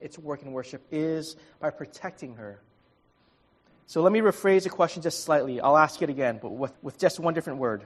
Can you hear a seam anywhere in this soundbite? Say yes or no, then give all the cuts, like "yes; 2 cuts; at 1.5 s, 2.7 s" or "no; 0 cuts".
yes; 1 cut; at 6.7 s